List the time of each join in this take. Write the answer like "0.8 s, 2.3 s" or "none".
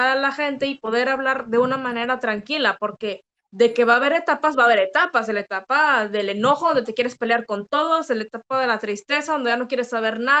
none